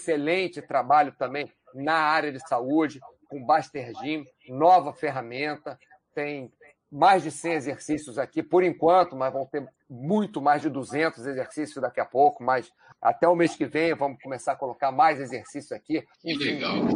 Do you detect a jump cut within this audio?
no; 0 cuts

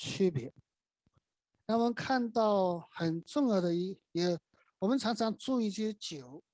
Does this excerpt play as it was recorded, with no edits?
yes; 0 cuts

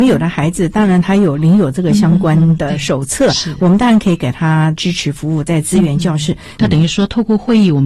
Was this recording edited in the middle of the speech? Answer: yes; 1 cut; at 6.6 s

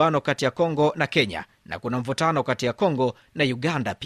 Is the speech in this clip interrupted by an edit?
no; 0 cuts

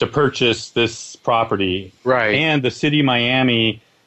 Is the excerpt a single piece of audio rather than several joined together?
yes; 0 cuts

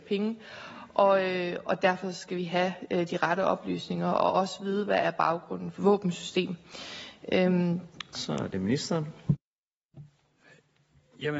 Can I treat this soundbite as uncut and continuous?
no; 2 cuts; at 5.8 s, 8.1 s

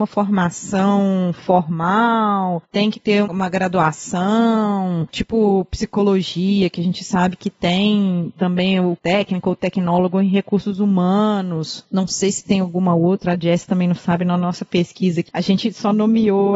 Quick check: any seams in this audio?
no; 0 cuts

